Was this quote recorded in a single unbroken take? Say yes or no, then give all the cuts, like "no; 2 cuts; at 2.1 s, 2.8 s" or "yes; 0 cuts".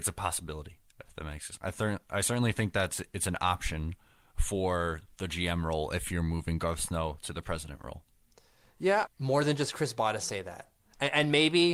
no; 1 cut; at 9.1 s